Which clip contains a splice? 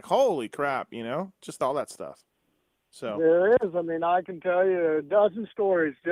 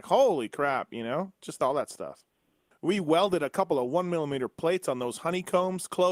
second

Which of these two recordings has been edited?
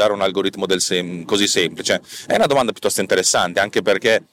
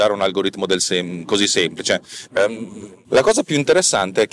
second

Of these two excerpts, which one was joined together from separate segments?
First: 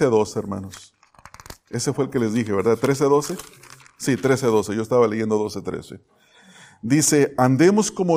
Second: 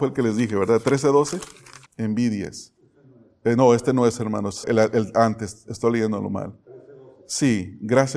second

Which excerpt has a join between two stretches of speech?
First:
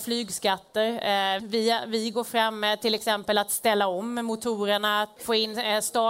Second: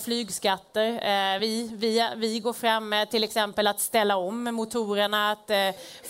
first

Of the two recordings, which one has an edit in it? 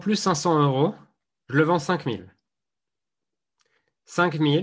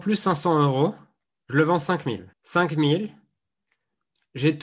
second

